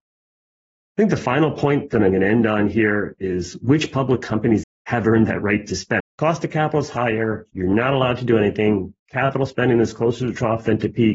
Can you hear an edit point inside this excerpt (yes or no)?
yes